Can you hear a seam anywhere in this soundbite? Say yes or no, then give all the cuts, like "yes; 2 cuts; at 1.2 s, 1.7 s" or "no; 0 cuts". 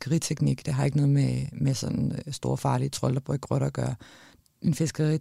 no; 0 cuts